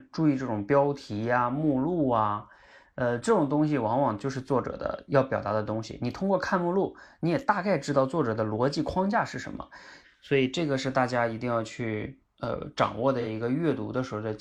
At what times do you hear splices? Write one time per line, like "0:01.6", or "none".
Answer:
0:10.0